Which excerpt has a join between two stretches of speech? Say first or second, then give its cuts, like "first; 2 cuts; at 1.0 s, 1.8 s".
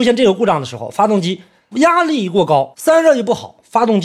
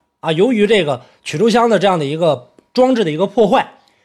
first; 2 cuts; at 1.7 s, 2.7 s